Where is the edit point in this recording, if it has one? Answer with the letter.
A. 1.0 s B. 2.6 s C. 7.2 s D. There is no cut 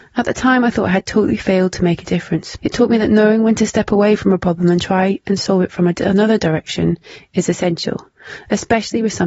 B